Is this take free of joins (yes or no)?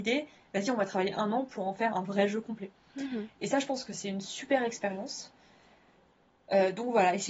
no